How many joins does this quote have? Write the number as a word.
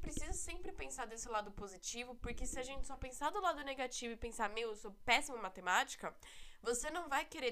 zero